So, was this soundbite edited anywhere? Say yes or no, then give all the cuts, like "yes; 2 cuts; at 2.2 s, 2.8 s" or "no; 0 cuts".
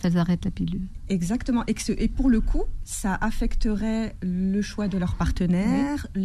no; 0 cuts